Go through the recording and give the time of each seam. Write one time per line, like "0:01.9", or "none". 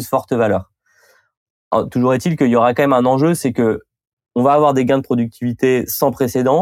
none

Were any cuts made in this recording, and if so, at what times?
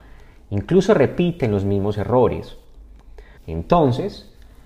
0:03.4

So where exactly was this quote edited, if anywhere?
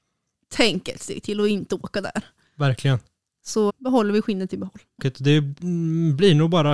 0:03.7
0:05.0

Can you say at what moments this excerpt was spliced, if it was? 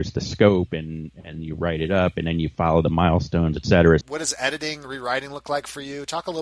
0:04.0

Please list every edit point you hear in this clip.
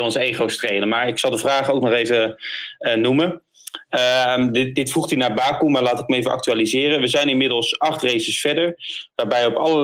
none

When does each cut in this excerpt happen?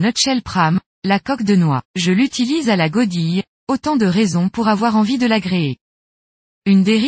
0:01.8
0:03.6

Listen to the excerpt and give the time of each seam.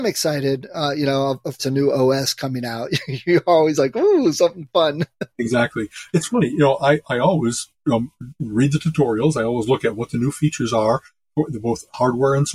0:01.6

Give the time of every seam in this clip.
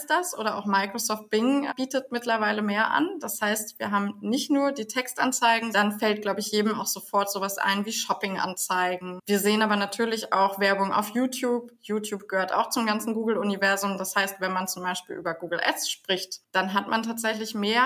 0:05.7

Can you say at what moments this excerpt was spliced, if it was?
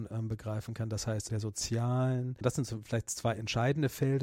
0:01.3

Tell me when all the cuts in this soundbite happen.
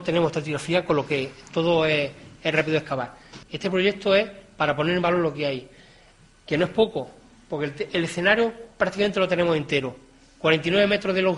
0:03.4

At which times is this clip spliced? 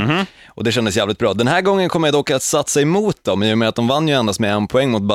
none

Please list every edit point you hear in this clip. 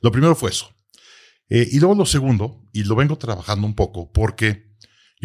none

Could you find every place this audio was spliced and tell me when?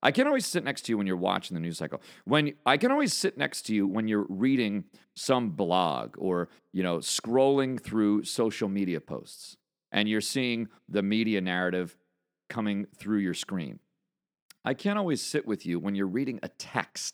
none

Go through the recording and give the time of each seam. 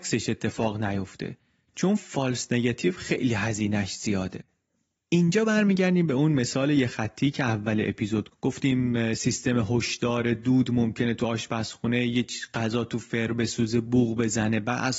0:08.3

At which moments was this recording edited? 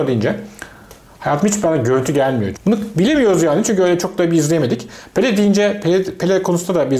0:02.5

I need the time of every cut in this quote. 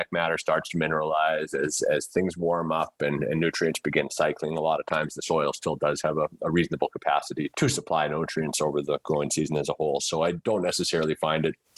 0:07.5

